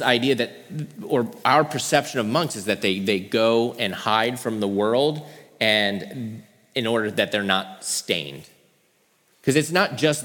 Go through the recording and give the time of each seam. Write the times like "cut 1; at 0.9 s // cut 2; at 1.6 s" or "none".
cut 1; at 9.3 s